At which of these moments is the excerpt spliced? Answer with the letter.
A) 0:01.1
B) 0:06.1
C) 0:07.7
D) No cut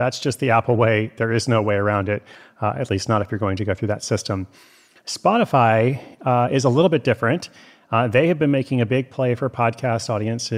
D